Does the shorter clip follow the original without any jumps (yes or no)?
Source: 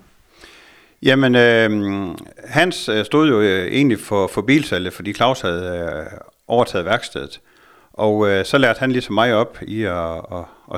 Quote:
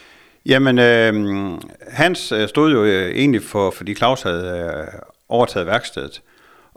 no